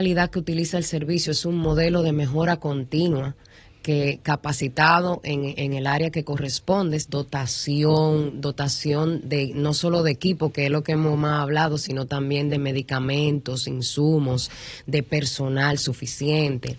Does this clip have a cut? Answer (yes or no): yes